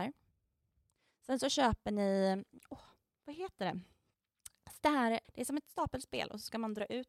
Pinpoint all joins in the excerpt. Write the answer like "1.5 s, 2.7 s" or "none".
5.2 s